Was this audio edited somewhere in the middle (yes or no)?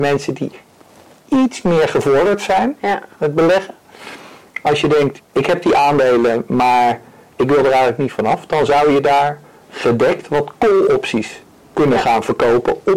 yes